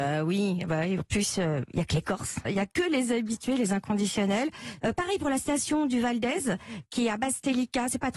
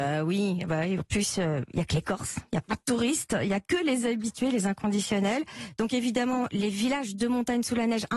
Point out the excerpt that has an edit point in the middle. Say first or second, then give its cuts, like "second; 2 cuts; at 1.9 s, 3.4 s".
first; 2 cuts; at 2.4 s, 4.8 s